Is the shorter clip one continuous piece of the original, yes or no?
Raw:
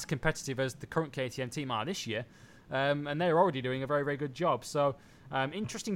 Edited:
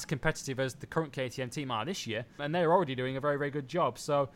no